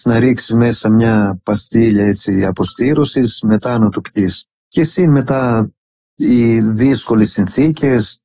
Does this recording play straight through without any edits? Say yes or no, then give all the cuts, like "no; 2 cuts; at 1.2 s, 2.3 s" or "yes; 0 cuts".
yes; 0 cuts